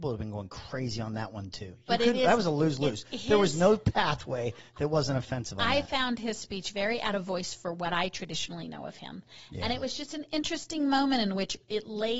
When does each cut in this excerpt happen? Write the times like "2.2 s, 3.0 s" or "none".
none